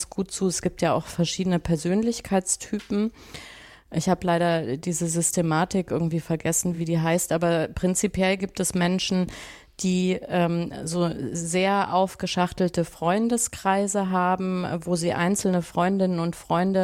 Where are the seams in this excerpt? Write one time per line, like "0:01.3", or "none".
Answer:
none

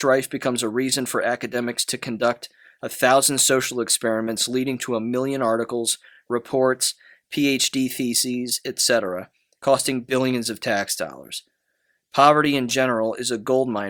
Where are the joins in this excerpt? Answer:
none

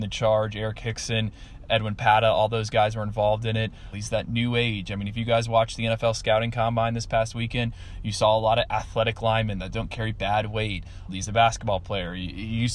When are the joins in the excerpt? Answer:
0:03.9
0:11.1

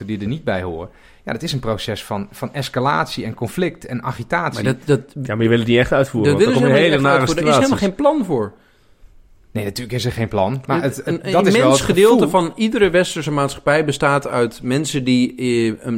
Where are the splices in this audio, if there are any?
none

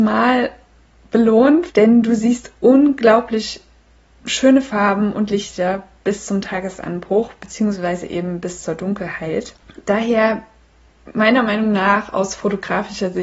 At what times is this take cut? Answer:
0:01.7

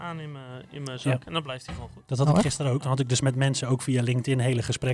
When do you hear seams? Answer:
none

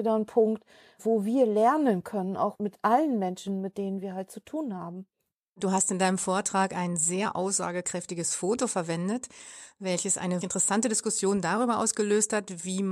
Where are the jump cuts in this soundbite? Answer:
0:10.4

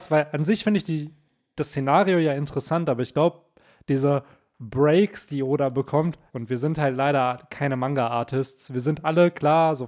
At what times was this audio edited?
0:06.3

